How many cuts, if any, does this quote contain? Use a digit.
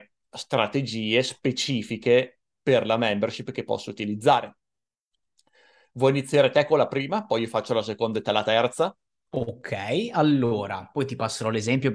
0